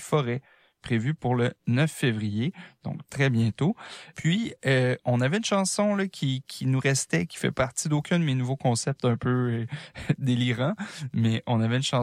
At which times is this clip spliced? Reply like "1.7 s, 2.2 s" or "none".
4.1 s